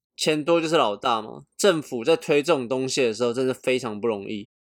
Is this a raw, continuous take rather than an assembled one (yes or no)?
yes